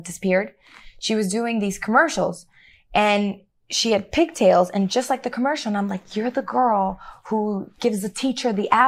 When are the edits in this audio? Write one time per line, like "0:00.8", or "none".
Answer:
none